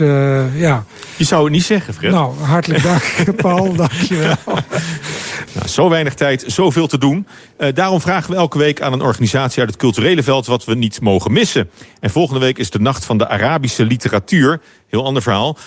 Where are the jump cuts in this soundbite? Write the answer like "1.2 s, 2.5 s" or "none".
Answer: 5.5 s